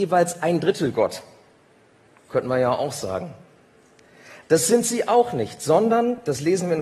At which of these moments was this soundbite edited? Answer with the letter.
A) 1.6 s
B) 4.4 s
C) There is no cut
B